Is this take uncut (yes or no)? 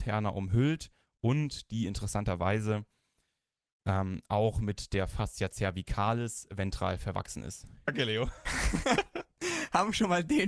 no